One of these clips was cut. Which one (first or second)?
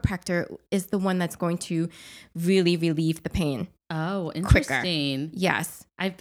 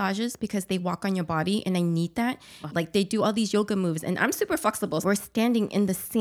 second